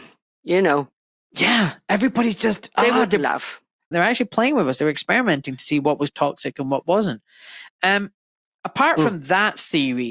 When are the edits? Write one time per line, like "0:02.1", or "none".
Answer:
0:03.9